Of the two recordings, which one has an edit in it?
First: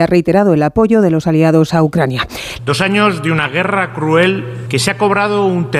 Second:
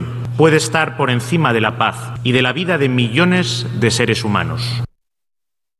first; 1 cut; at 2.6 s

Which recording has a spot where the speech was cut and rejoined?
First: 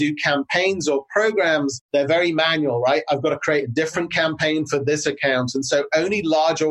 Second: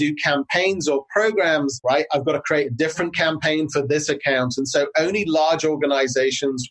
second; 1 cut; at 1.8 s

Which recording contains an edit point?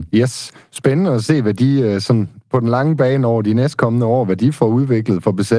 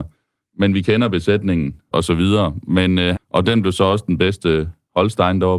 second; 2 cuts; at 1.9 s, 3.1 s

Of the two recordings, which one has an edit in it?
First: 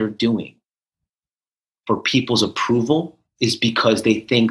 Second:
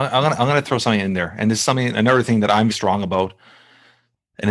second; 1 cut; at 2.7 s

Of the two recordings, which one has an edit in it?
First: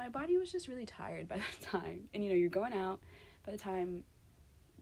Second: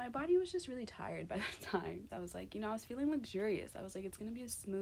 second; 1 cut; at 2.1 s

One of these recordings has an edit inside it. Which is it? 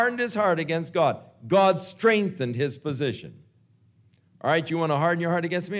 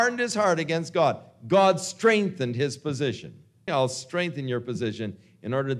second; 1 cut; at 3.7 s

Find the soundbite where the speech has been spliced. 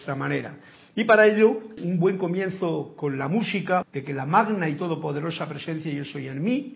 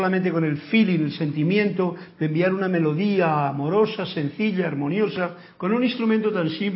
first; 2 cuts; at 1.8 s, 3.8 s

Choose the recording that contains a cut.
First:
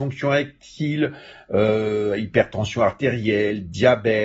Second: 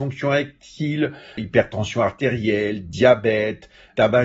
second; 1 cut; at 1.4 s

